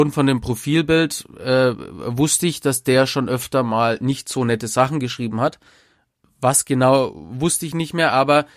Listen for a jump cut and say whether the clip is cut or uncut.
uncut